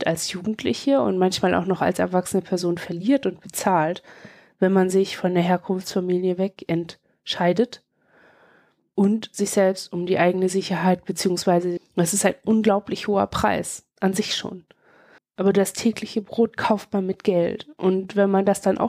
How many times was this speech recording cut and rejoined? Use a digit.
2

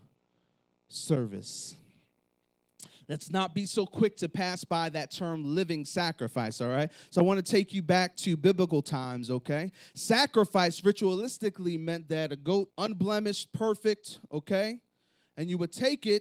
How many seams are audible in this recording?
1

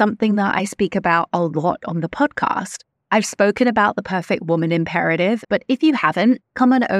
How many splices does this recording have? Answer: 1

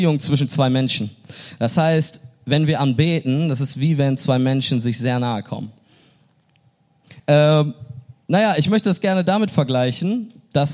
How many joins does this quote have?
1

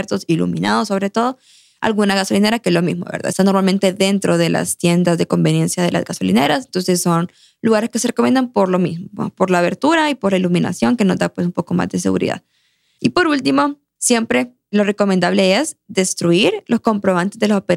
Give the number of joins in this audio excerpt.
0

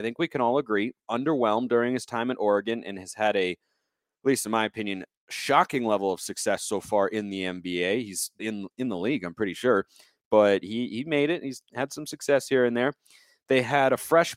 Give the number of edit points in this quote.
1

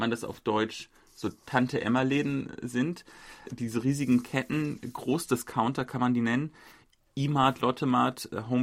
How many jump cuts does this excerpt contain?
1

